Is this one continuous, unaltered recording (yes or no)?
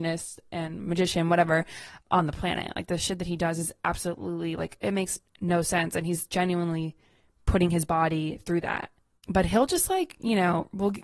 yes